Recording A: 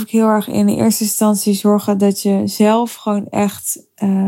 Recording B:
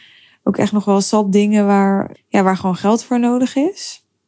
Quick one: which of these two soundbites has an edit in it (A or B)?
B